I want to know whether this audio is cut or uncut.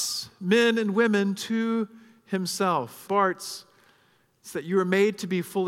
cut